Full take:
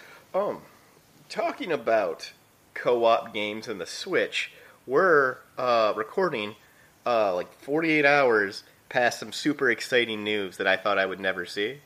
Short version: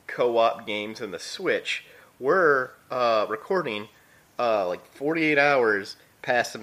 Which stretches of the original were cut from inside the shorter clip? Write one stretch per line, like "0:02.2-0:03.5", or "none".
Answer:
none